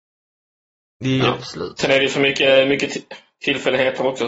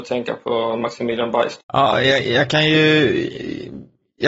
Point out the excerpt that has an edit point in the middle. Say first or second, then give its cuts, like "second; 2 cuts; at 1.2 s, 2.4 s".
second; 1 cut; at 1.6 s